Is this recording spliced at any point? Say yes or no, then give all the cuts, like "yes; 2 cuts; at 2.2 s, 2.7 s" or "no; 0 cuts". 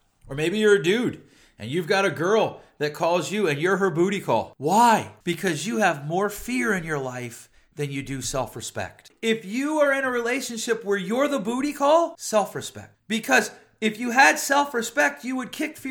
yes; 2 cuts; at 9.1 s, 12.2 s